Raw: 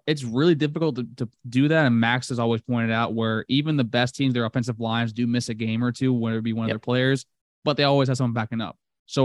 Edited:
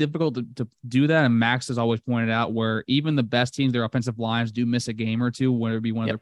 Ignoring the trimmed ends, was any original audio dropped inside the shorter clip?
no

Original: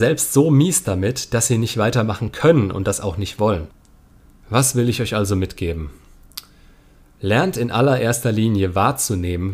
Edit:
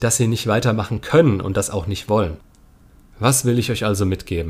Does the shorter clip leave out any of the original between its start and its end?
no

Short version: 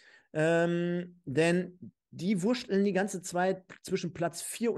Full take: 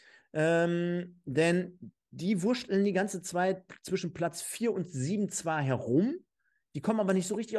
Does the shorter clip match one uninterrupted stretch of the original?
yes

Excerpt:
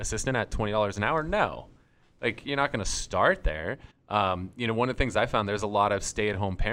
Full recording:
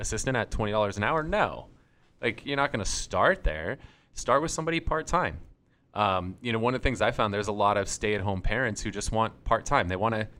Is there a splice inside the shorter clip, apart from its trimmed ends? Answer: yes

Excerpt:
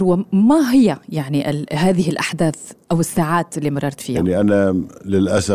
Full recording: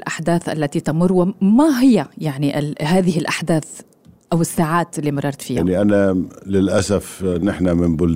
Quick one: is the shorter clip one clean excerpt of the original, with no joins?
no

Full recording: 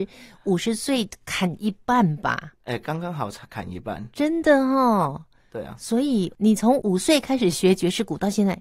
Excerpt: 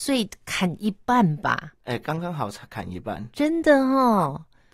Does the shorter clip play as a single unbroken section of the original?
yes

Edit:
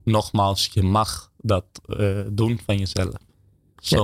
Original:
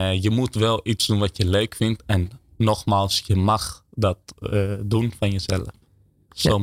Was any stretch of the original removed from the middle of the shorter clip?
no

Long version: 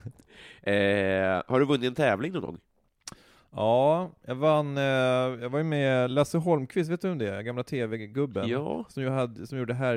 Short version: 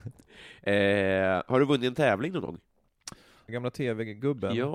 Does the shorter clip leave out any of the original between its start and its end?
yes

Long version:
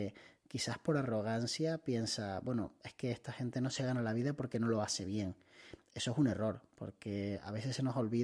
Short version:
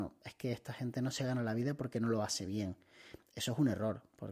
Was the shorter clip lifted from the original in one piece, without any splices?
yes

